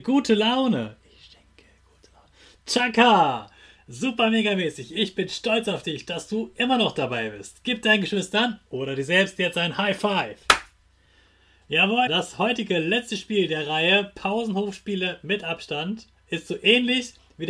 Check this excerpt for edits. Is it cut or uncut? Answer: cut